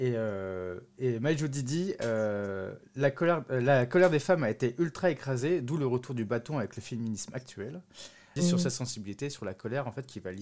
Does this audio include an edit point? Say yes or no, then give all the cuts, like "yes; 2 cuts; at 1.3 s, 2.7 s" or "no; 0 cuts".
yes; 1 cut; at 8.4 s